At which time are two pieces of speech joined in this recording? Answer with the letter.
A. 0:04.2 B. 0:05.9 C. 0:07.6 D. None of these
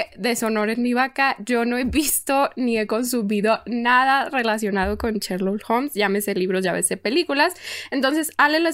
D